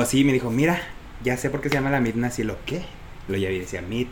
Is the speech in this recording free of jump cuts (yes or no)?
yes